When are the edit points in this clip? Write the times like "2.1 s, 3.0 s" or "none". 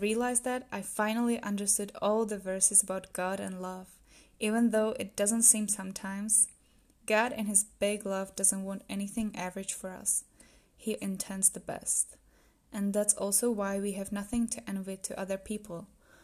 11.0 s